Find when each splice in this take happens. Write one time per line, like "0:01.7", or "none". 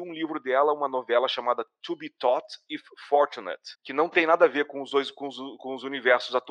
0:03.7